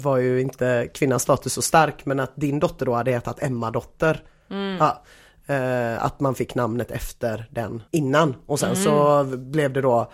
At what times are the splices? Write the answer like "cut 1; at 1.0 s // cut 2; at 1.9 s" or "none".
cut 1; at 7.9 s